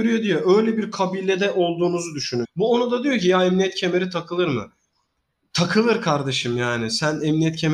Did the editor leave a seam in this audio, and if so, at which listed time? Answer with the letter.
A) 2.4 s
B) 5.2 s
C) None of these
A